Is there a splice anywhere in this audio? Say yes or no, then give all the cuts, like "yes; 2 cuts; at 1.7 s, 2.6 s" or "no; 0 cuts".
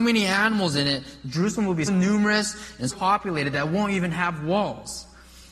yes; 2 cuts; at 1.9 s, 2.9 s